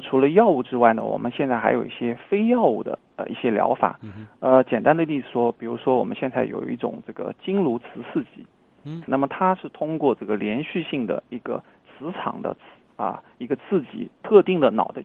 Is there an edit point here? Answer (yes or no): yes